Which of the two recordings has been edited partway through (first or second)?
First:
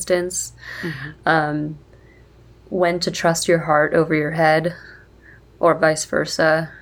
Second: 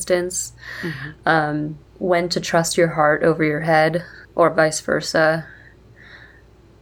second